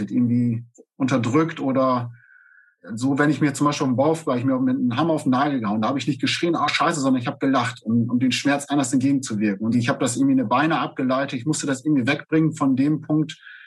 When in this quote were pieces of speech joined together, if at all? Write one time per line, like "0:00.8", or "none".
none